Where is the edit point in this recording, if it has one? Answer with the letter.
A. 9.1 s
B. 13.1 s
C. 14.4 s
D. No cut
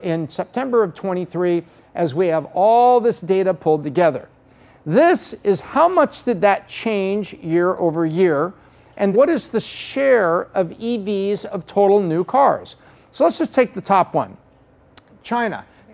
A